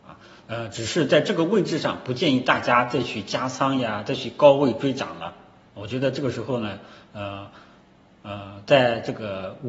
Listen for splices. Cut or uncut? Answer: uncut